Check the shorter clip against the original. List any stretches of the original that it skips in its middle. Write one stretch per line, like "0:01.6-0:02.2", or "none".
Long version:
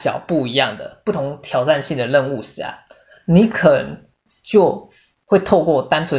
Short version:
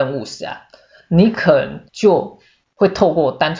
0:04.1-0:04.4